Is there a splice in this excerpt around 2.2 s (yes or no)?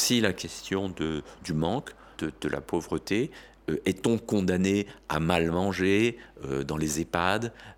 yes